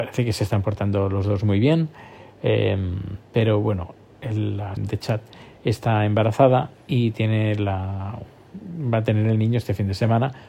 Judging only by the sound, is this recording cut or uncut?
cut